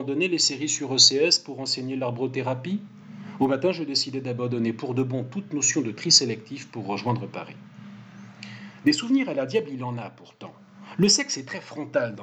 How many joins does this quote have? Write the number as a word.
zero